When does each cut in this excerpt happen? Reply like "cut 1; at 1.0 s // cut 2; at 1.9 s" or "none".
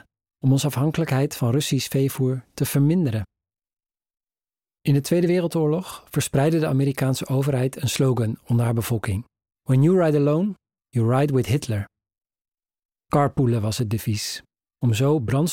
cut 1; at 13.0 s